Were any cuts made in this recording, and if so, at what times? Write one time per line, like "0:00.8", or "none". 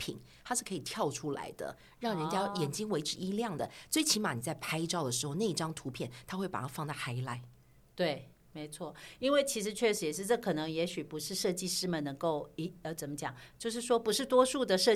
none